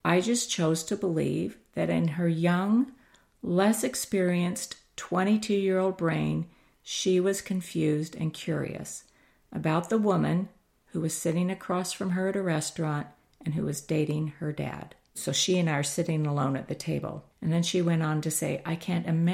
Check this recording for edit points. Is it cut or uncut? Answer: cut